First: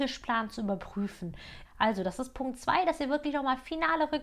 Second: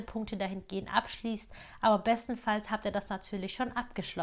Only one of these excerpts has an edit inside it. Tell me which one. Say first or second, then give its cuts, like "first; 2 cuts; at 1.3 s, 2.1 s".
first; 1 cut; at 1.6 s